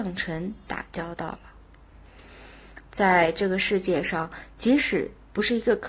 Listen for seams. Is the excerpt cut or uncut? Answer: uncut